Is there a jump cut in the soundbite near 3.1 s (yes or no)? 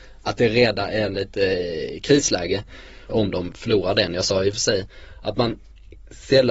yes